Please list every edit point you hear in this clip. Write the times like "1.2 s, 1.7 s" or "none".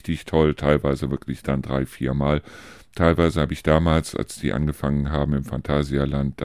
none

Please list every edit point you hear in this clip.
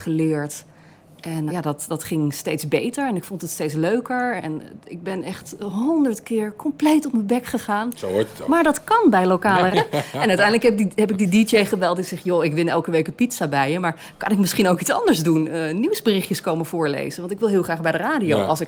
1.5 s, 9.7 s

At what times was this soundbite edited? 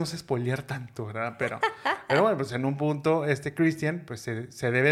none

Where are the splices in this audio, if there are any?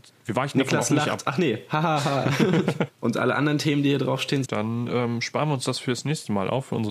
2.9 s, 4.4 s

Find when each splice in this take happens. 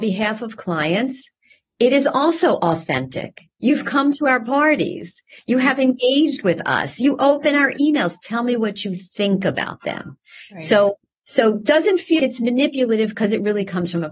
3.6 s, 12.2 s

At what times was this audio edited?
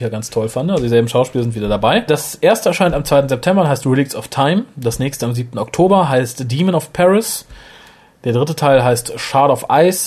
none

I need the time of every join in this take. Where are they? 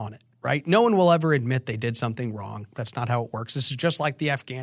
none

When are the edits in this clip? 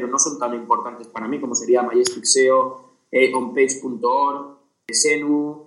none

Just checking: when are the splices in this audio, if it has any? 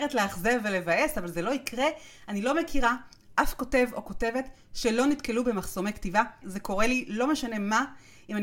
6.4 s

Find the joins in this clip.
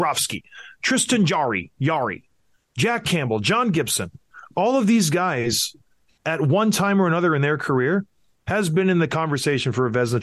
none

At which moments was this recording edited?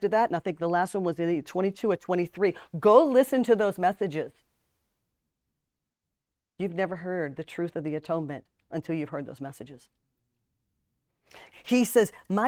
11.5 s

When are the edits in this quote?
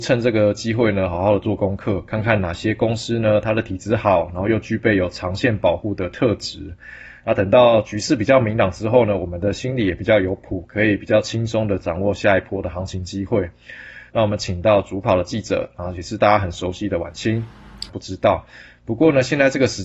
14.1 s, 17.9 s

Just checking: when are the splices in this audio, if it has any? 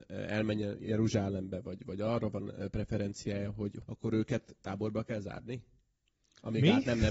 3.8 s

